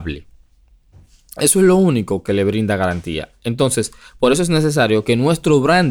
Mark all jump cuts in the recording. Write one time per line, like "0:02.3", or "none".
none